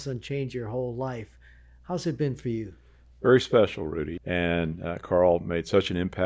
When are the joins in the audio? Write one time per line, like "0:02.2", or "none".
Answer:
0:04.2